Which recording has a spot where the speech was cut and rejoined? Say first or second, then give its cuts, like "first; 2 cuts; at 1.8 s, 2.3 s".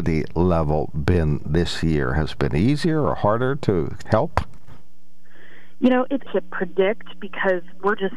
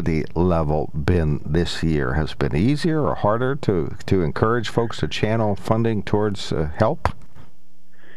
first; 2 cuts; at 4.1 s, 6.3 s